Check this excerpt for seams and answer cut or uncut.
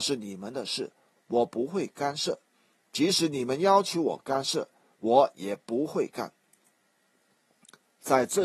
uncut